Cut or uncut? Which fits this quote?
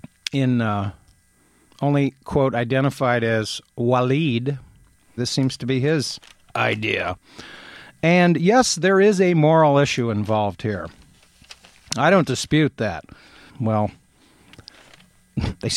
cut